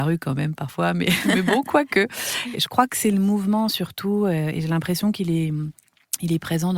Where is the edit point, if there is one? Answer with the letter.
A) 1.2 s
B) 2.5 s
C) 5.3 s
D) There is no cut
B